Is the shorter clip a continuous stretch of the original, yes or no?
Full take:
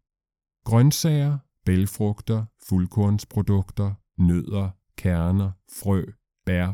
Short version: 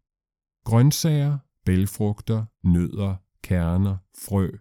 no